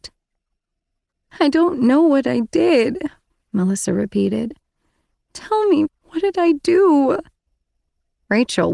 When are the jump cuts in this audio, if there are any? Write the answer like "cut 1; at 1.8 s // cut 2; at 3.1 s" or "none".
cut 1; at 5.9 s